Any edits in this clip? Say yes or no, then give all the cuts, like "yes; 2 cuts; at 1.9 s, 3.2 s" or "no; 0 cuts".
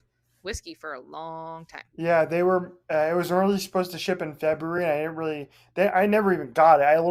no; 0 cuts